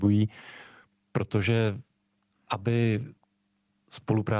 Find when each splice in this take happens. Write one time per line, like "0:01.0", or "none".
none